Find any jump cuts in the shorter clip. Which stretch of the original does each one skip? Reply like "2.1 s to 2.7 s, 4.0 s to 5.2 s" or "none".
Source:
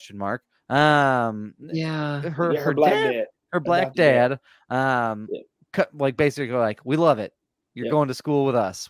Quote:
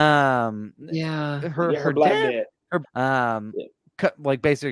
3.6 s to 4.6 s